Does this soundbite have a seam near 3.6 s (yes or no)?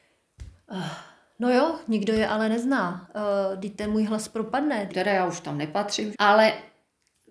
no